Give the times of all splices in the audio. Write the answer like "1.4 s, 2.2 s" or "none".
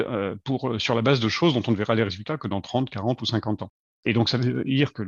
3.9 s